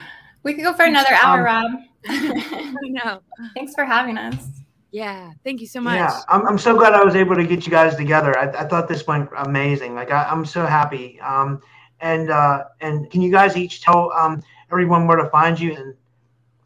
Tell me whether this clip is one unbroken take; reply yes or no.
no